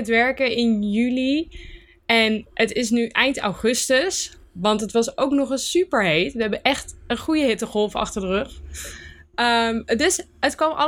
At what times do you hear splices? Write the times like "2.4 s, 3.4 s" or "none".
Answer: none